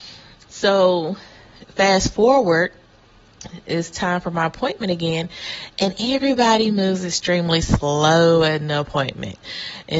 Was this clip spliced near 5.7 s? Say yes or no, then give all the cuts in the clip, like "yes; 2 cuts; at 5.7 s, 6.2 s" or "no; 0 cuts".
no; 0 cuts